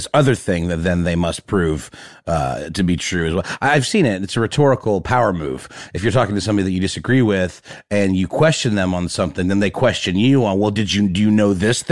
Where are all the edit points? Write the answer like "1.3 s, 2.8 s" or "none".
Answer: none